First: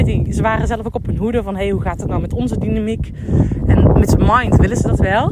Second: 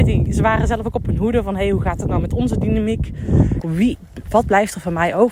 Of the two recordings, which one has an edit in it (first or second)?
second